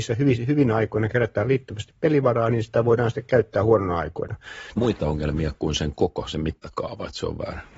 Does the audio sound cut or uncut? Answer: cut